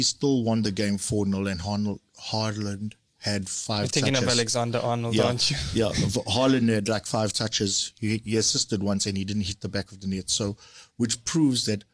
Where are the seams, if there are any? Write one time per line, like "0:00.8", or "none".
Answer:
none